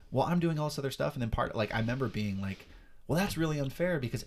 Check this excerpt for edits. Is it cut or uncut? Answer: uncut